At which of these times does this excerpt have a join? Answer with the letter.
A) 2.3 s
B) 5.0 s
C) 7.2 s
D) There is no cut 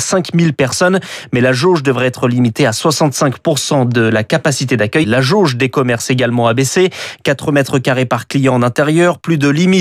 B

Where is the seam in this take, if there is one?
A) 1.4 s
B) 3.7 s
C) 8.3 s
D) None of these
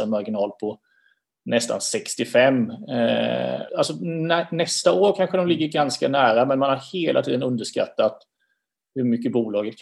B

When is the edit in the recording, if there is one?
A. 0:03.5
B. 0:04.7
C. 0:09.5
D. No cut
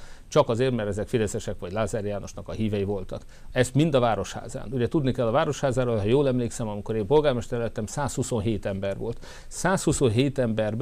D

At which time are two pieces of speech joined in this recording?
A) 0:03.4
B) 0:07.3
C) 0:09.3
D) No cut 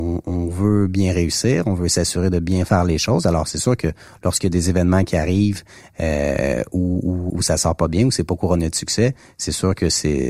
B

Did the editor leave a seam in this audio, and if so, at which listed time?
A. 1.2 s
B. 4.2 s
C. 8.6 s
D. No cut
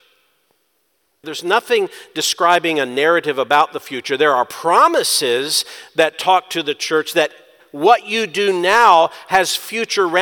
A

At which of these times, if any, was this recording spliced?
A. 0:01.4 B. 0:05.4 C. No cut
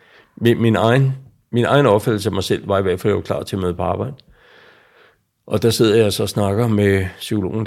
C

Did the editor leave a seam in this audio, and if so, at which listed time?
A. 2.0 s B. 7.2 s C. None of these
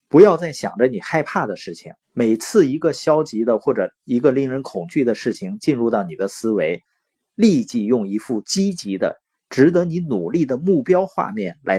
A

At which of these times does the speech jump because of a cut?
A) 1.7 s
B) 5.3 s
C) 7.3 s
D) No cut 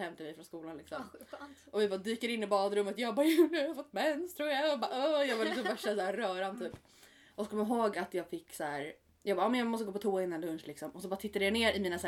C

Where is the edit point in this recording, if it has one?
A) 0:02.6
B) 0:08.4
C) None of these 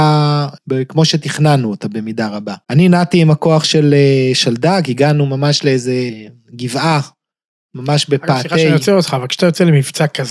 A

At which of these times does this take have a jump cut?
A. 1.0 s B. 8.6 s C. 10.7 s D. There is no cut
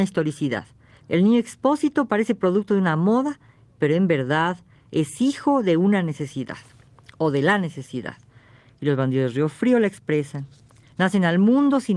A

